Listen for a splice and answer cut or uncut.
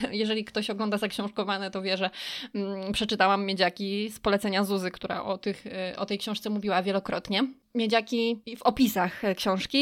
cut